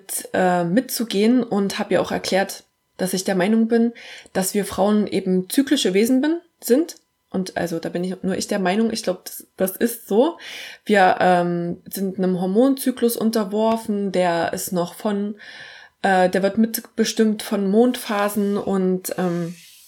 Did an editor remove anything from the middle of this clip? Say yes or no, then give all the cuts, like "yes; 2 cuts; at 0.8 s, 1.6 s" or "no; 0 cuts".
no; 0 cuts